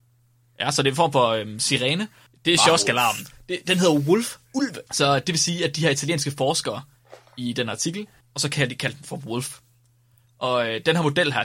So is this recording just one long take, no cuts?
no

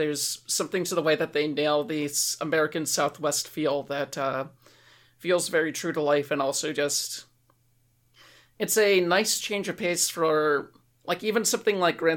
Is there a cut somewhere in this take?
no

